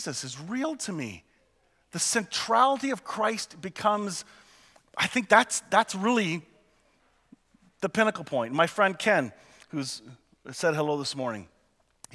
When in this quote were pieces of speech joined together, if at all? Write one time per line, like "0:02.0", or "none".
none